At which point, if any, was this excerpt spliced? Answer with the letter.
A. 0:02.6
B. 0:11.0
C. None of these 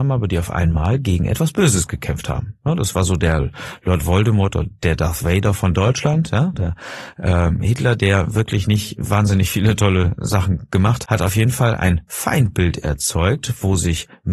B